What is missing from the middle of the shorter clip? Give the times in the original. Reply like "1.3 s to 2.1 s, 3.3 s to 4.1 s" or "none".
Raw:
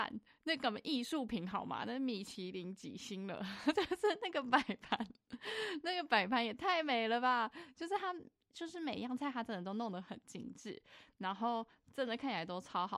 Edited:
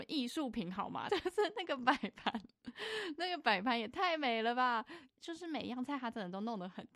1.8 s to 3.7 s, 7.7 s to 8.4 s